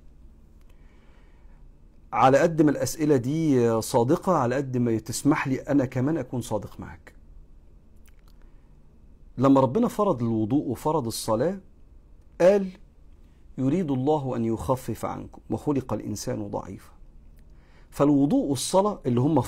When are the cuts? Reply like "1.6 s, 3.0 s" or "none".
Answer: none